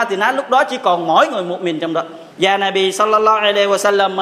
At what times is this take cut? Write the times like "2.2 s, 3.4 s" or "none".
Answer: 2.3 s